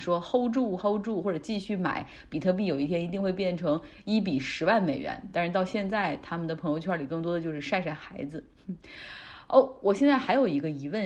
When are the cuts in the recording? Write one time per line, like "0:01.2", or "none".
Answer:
none